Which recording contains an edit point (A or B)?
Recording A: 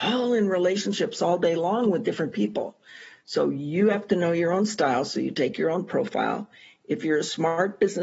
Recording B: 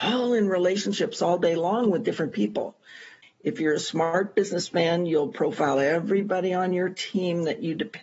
B